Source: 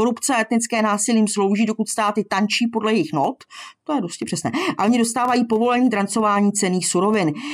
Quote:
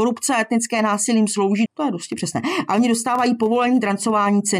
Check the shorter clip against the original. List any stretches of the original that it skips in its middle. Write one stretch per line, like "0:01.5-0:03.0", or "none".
0:01.7-0:03.8